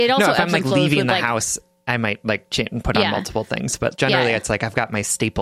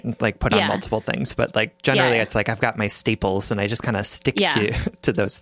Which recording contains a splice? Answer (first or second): first